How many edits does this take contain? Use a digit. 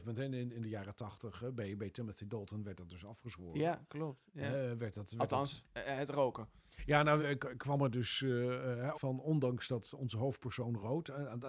2